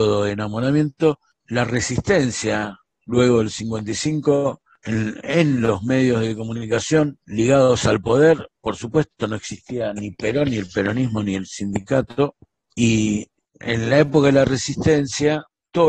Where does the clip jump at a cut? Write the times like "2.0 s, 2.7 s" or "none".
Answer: 7.2 s